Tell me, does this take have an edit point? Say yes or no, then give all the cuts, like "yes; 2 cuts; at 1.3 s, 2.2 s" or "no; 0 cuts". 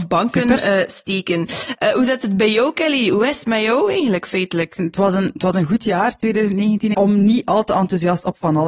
yes; 2 cuts; at 4.8 s, 6.9 s